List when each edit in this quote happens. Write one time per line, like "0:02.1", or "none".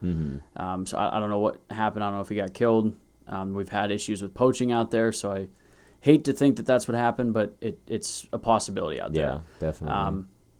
none